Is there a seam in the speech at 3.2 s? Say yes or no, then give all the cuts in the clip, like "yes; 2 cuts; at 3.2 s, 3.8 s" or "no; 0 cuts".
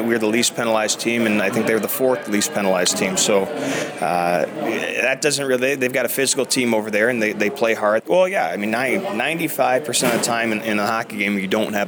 no; 1 cut; at 8.0 s